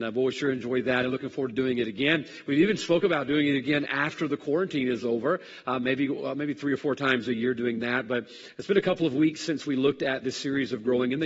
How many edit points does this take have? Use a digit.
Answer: 0